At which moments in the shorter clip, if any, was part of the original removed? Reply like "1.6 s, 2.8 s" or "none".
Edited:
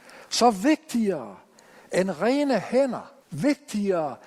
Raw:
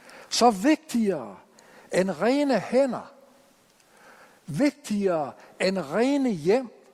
3.2 s